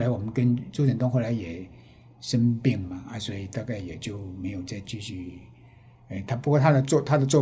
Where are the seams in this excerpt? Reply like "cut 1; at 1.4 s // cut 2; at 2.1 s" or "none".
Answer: none